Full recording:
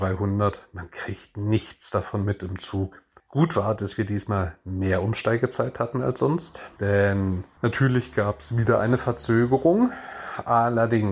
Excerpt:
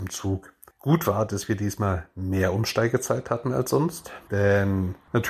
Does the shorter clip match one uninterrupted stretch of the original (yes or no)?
yes